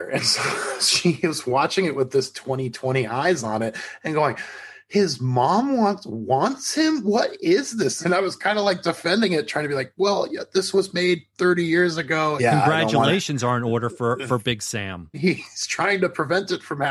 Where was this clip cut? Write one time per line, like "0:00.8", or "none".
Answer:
0:08.0
0:12.4
0:15.1